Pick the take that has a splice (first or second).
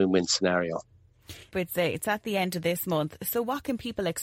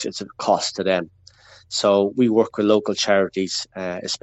first